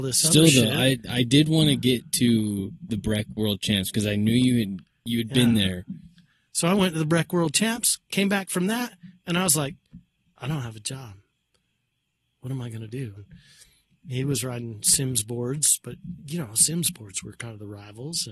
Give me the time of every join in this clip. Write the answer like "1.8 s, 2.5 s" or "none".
13.2 s